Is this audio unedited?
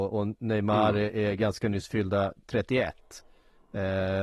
yes; 0 cuts

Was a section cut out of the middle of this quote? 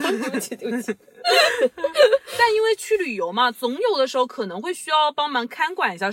no; 0 cuts

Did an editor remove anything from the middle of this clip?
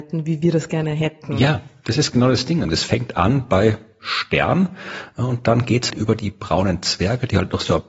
yes; 2 cuts; at 2.6 s, 5.9 s

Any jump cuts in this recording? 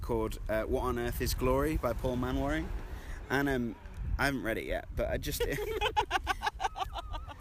no; 0 cuts

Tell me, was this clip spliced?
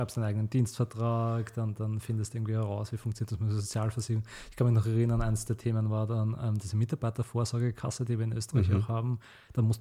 no; 0 cuts

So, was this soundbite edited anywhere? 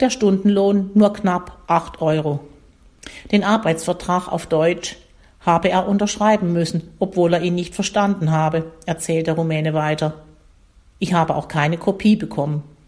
yes; 1 cut; at 3.3 s

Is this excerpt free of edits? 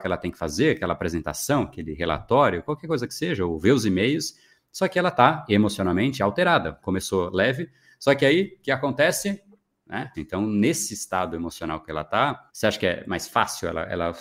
no; 3 cuts; at 6.8 s, 10.1 s, 12.5 s

